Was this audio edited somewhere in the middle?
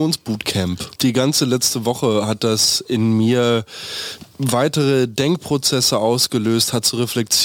yes; 1 cut; at 1.0 s

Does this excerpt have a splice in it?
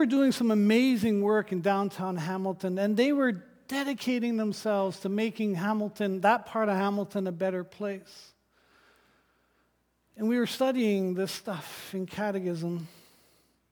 no; 0 cuts

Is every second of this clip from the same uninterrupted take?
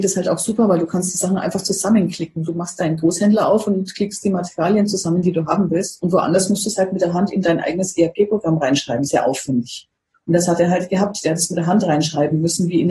yes; 0 cuts

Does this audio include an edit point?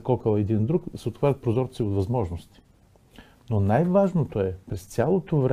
no; 0 cuts

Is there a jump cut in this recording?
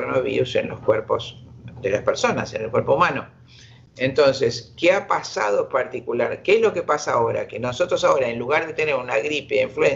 no; 0 cuts

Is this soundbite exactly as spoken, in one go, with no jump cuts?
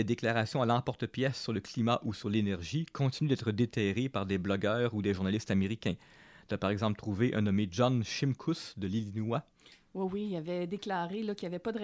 yes; 0 cuts

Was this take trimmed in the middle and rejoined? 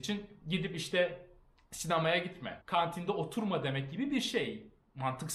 yes; 1 cut; at 2.6 s

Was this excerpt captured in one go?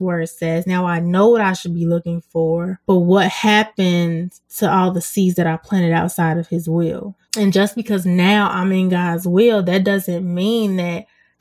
no; 1 cut; at 7.2 s

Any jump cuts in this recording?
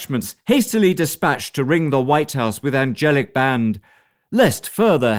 no; 0 cuts

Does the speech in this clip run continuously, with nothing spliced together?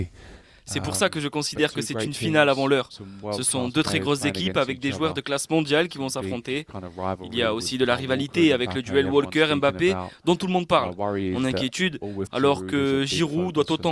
no; 1 cut; at 12.3 s

